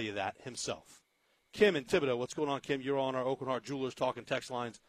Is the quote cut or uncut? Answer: uncut